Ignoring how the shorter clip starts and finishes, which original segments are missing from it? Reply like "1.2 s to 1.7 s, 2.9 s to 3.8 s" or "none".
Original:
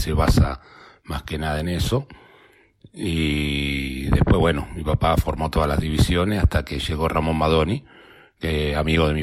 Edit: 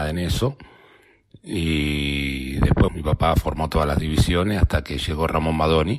4.4 s to 4.7 s